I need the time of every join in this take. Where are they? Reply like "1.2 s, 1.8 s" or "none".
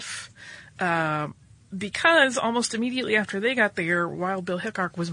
none